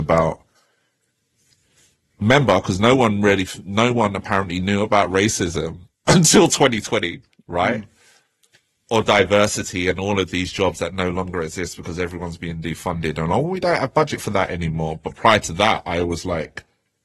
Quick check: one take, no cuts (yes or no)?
yes